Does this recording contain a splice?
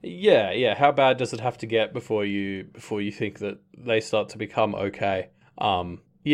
no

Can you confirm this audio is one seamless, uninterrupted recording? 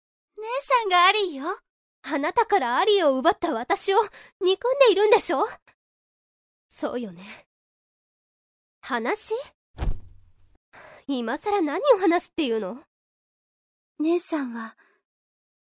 no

